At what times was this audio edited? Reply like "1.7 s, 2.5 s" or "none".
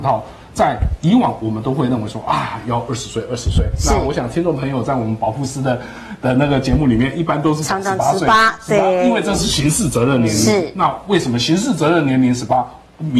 none

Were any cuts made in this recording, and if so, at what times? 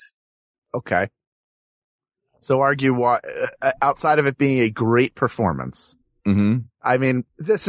none

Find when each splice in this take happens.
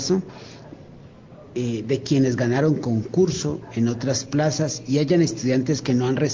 none

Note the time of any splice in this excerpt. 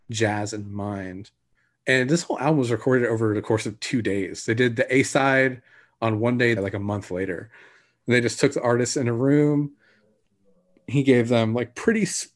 6.6 s

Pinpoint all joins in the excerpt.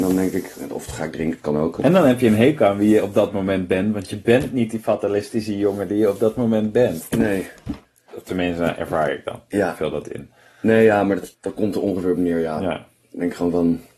11.3 s

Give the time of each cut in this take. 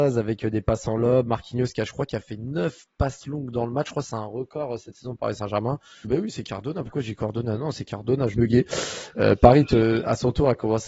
6.0 s, 8.3 s

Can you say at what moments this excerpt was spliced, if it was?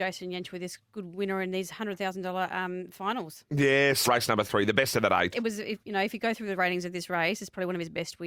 4.1 s, 5.3 s

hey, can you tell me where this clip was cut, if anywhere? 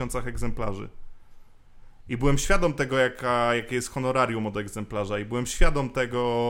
none

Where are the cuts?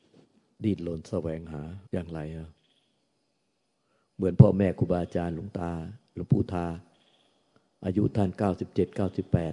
1.9 s

